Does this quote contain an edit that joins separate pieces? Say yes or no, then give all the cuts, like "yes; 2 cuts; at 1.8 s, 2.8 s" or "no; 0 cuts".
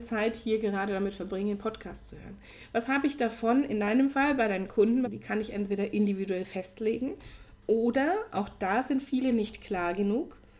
yes; 1 cut; at 5.0 s